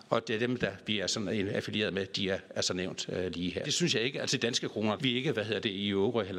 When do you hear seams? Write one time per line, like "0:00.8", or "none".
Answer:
0:03.6
0:05.0